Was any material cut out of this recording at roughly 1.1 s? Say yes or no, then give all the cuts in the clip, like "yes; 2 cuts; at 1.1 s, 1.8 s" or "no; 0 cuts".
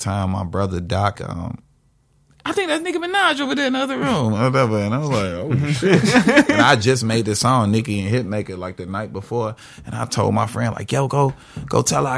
yes; 1 cut; at 1.1 s